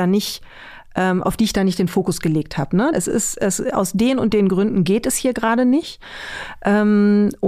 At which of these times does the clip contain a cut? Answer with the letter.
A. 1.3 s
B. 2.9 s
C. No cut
B